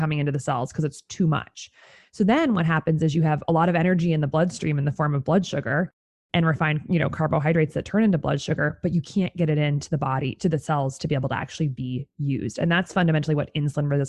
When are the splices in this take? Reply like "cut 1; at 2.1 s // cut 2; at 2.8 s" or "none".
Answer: none